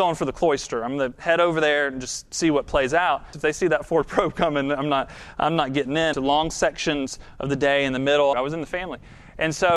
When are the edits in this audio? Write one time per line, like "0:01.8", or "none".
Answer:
0:03.3
0:06.1
0:08.3